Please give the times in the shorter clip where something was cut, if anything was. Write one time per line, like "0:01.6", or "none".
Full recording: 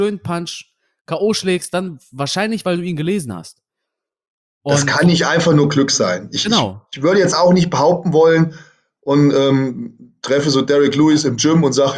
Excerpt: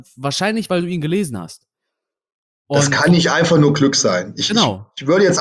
none